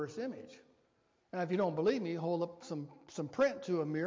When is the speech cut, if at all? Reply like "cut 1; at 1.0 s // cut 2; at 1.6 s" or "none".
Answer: none